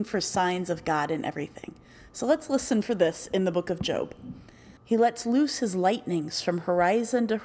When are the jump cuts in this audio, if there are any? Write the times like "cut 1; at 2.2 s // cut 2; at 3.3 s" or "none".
cut 1; at 4.8 s